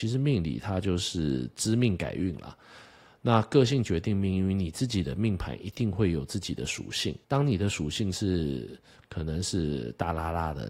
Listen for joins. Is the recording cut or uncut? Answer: cut